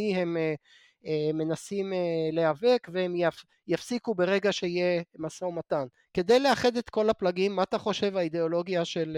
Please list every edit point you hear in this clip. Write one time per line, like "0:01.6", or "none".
0:06.0